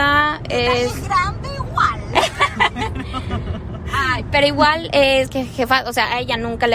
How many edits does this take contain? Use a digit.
0